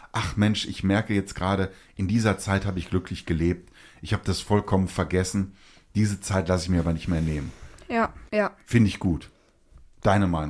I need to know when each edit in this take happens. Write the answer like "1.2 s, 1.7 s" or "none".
8.3 s

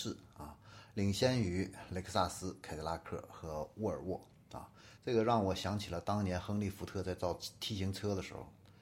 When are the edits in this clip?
5.0 s

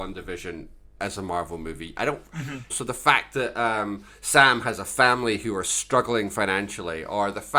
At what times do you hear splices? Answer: 1.0 s, 2.7 s

